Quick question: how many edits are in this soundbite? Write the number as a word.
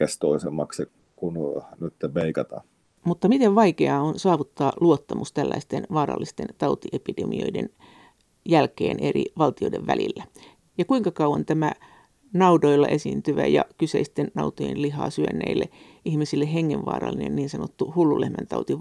zero